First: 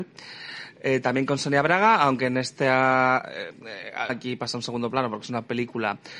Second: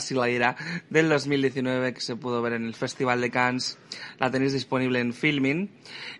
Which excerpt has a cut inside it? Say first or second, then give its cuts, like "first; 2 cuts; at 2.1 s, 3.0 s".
first; 1 cut; at 4.1 s